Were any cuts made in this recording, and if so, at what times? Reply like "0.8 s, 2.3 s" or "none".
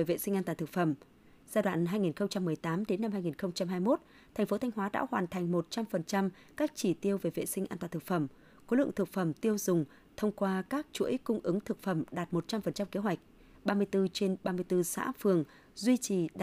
none